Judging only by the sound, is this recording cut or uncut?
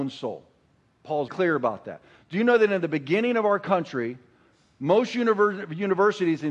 cut